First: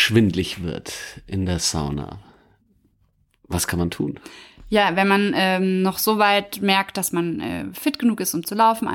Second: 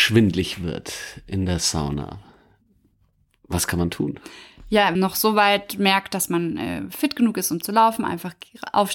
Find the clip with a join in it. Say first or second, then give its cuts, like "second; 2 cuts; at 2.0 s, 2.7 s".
second; 1 cut; at 5.0 s